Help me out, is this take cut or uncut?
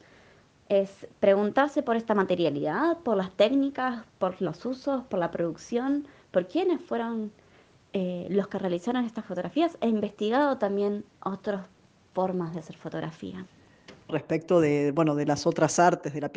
cut